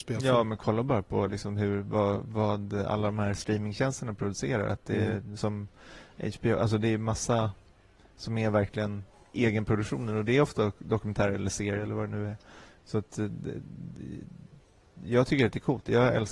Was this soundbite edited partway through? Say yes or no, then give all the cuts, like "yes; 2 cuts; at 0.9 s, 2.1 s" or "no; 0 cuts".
no; 0 cuts